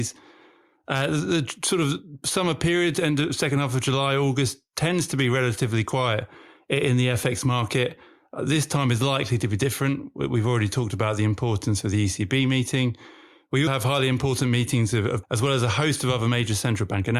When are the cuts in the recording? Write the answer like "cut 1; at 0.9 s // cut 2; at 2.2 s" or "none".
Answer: cut 1; at 13.7 s // cut 2; at 15.2 s